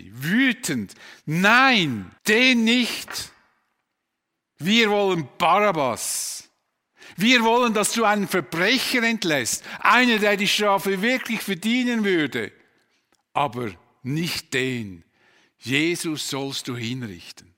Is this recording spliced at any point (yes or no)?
yes